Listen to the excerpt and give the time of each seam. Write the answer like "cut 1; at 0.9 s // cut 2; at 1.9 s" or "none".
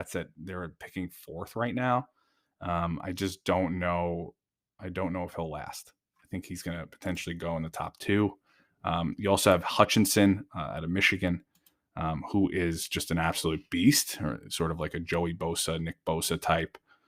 none